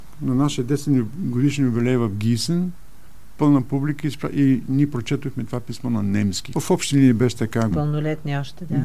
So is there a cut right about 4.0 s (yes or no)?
no